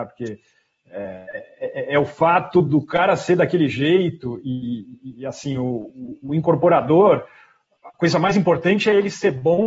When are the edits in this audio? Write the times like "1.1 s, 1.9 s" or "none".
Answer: none